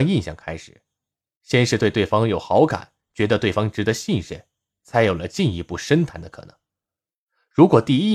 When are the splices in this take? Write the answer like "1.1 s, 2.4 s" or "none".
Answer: none